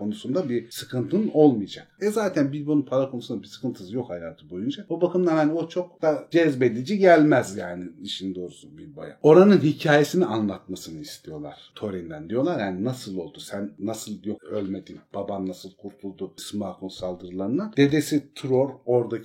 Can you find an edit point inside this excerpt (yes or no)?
yes